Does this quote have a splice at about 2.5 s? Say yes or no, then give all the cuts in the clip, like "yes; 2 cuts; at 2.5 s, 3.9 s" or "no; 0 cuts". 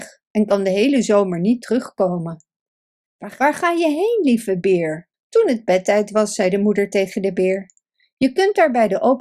no; 1 cut; at 5.1 s